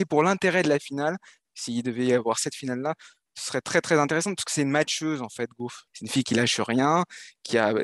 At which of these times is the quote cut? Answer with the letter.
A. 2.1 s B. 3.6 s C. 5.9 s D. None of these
C